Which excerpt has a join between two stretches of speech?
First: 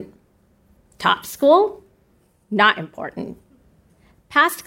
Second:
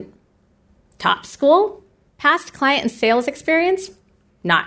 second; 1 cut; at 2.1 s

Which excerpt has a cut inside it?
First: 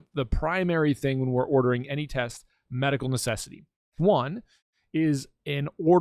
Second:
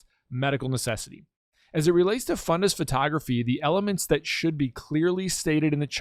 first; 1 cut; at 4.0 s

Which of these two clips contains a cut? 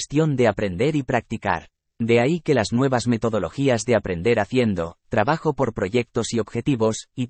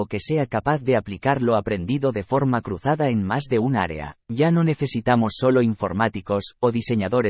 second; 1 cut; at 4.2 s

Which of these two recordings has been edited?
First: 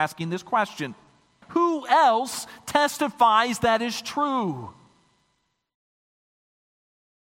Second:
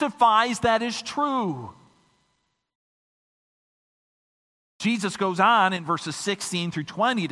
first; 1 cut; at 1.4 s

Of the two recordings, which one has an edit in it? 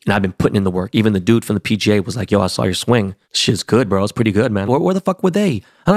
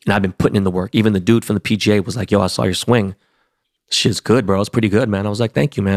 first; 2 cuts; at 3.2 s, 4.7 s

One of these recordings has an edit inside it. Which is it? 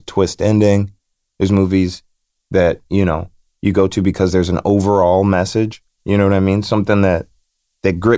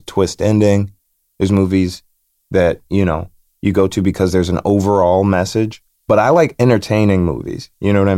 first; 1 cut; at 6.0 s

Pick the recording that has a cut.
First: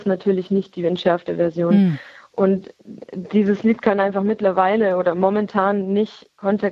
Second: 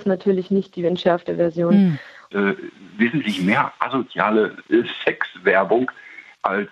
second; 1 cut; at 2.3 s

